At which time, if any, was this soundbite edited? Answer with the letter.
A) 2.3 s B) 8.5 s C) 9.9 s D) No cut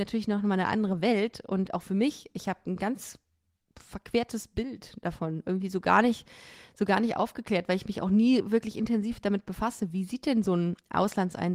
D